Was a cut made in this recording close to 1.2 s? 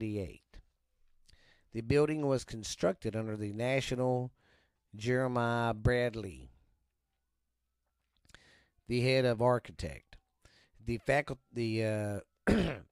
no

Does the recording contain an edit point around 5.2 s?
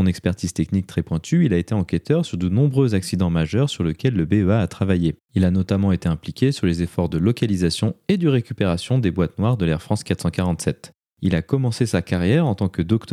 yes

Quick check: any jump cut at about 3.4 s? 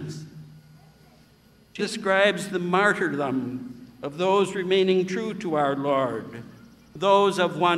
no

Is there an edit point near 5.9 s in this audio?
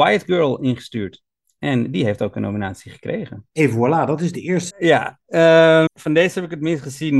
yes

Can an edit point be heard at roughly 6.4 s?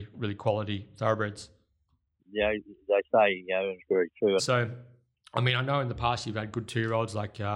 no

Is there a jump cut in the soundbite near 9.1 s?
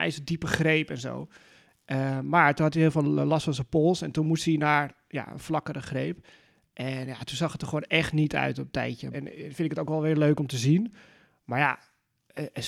yes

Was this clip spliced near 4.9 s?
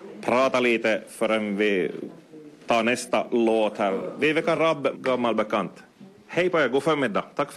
yes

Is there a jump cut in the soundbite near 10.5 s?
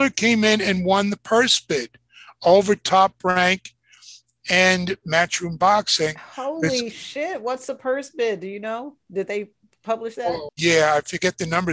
yes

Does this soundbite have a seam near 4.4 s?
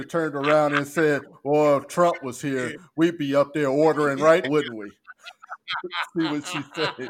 yes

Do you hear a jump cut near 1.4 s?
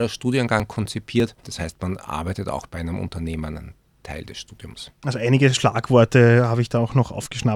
no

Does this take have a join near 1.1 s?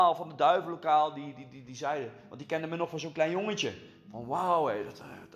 no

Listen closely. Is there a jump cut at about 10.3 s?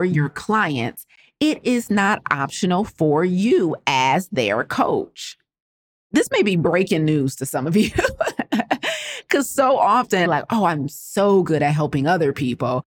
yes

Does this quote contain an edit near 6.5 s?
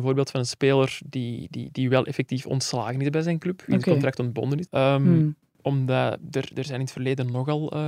no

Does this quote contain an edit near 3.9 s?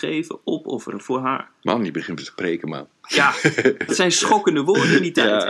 yes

